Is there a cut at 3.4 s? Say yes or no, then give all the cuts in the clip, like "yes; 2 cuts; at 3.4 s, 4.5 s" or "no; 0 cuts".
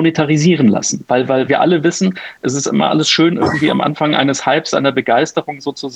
no; 1 cut; at 1.5 s